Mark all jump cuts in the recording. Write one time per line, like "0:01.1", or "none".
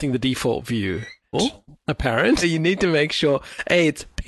0:01.3
0:02.4